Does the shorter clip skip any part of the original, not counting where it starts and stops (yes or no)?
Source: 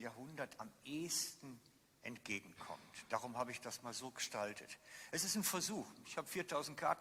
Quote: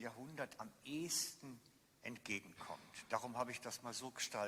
no